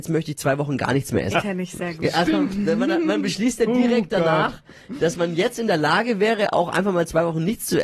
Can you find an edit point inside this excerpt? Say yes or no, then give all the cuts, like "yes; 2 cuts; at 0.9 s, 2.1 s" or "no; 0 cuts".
yes; 1 cut; at 1.3 s